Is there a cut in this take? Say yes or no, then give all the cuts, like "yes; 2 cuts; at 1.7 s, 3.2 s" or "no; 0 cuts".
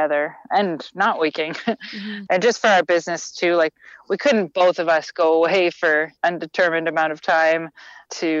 yes; 1 cut; at 2.3 s